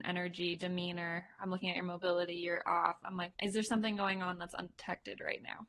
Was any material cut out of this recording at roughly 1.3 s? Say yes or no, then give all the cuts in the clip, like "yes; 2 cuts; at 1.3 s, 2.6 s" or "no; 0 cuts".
no; 1 cut; at 3.3 s